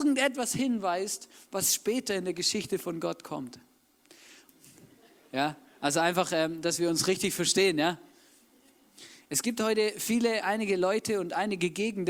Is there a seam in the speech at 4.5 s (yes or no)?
yes